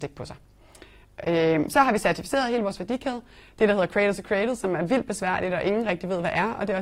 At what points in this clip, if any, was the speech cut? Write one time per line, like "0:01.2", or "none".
none